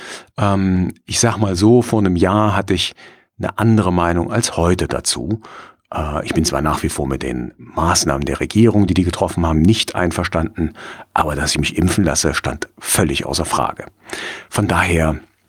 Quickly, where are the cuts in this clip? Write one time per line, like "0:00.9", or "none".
none

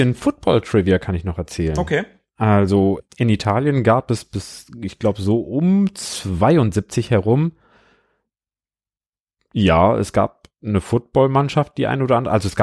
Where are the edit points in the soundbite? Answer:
none

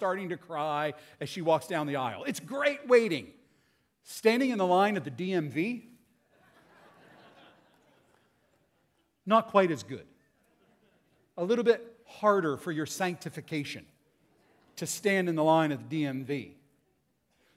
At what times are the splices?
none

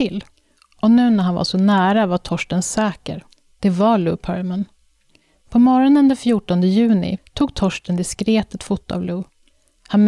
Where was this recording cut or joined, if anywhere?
0:07.2

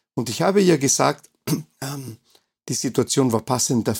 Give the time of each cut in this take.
0:01.7

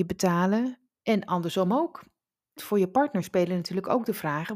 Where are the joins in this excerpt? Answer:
0:00.9
0:02.6

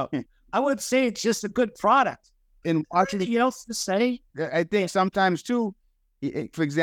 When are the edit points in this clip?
0:04.3

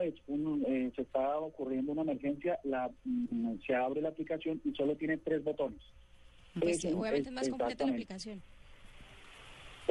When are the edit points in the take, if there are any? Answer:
0:06.6

